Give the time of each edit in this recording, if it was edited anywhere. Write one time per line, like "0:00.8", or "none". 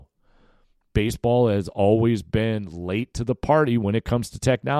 none